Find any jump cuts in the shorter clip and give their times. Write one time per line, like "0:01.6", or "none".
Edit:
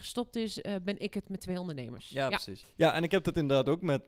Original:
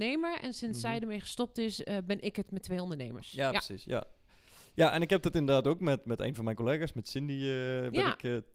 0:02.6